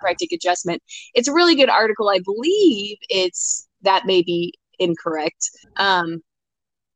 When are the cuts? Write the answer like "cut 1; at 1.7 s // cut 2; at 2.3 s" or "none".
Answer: cut 1; at 3.8 s // cut 2; at 5.6 s